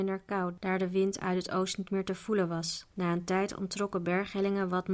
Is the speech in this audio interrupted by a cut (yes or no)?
yes